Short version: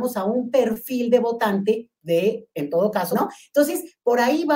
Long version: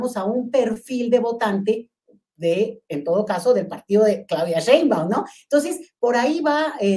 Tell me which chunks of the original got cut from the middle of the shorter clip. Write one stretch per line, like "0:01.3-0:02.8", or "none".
0:02.0-0:02.3
0:03.4-0:05.1